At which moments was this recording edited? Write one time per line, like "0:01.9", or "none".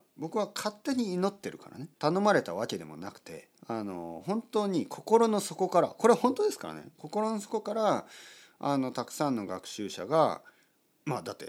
0:02.0
0:03.6